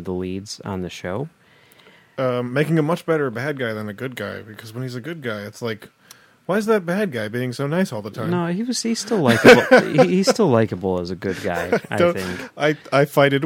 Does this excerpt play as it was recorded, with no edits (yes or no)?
yes